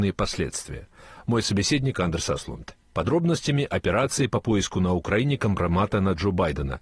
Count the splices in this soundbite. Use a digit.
1